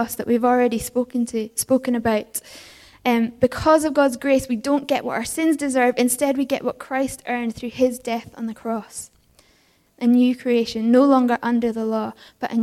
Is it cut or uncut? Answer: cut